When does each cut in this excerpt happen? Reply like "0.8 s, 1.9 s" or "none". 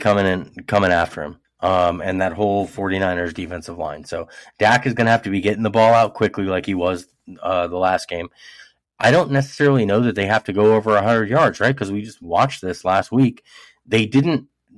9.0 s